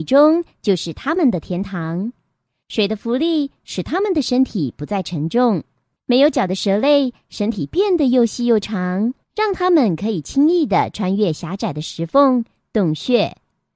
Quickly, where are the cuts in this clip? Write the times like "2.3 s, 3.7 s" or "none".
6.0 s, 9.2 s